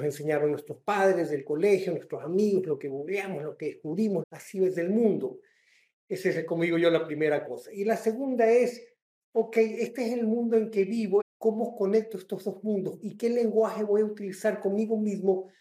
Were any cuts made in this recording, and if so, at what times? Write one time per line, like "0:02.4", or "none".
0:04.2
0:11.2
0:13.0